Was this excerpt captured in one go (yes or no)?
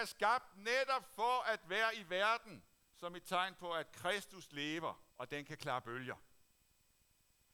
no